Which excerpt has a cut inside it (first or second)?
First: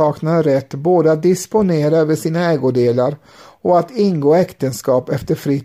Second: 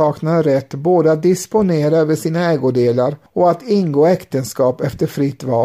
second